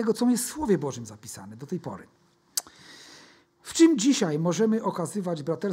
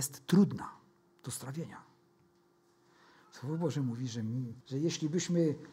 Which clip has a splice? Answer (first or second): second